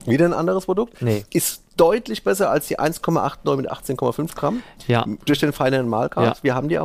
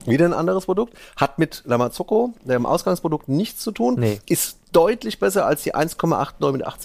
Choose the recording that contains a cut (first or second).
first